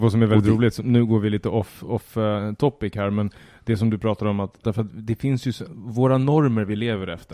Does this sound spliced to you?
yes; 1 cut; at 4.6 s

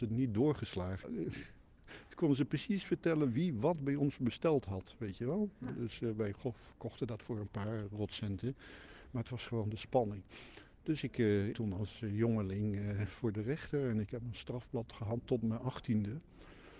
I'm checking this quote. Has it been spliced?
yes; 2 cuts; at 1.0 s, 11.5 s

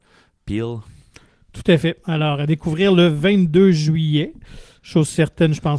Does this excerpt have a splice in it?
no; 0 cuts

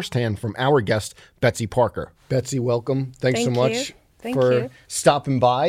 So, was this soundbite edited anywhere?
no; 0 cuts

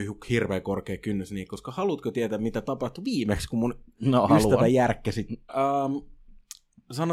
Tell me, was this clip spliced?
yes; 1 cut; at 5.5 s

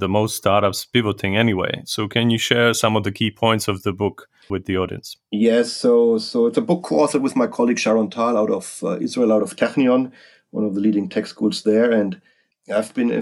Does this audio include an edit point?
no; 0 cuts

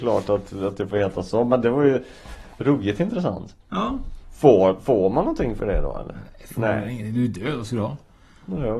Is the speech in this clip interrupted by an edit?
no; 0 cuts

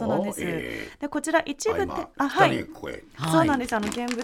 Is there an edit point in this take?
no; 0 cuts

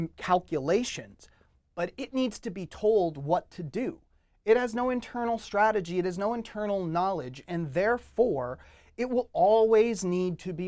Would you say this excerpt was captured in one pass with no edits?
yes; 0 cuts

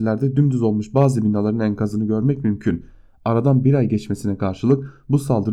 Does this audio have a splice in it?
no; 0 cuts

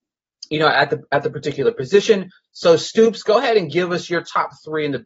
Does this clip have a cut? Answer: no; 0 cuts

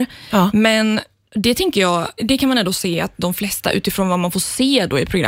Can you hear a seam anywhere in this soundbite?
yes; 1 cut; at 2.2 s

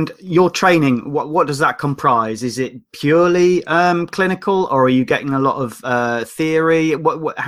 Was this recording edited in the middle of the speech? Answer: no; 0 cuts

